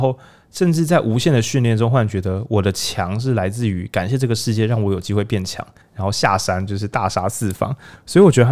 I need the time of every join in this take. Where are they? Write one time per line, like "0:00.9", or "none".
0:05.8